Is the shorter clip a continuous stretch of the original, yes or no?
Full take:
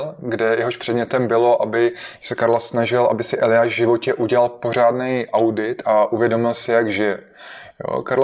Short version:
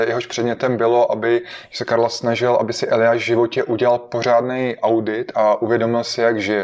yes